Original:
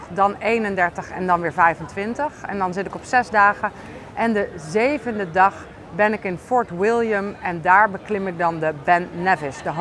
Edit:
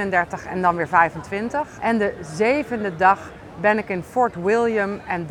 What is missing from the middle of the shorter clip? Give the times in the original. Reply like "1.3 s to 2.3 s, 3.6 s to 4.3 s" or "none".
2.4 s to 4.1 s